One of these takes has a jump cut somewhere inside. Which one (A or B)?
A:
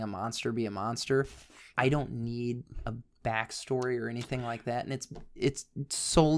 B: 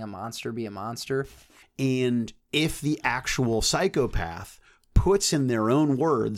B